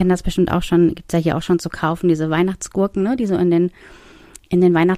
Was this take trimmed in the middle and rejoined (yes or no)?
no